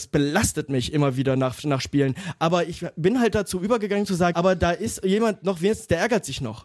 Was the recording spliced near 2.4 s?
no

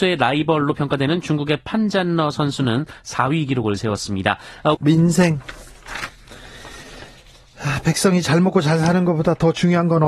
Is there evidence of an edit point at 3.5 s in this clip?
no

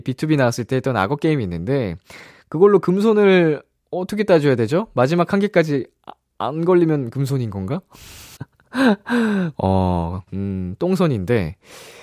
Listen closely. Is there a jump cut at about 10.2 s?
yes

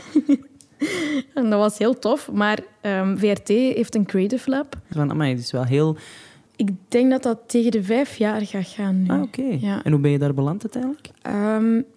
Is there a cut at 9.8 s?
no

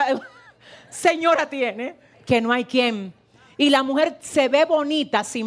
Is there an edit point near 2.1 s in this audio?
yes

